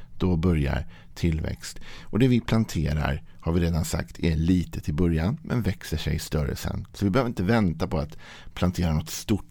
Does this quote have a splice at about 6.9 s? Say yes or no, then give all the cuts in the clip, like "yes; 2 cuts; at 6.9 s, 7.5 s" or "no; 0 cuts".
no; 0 cuts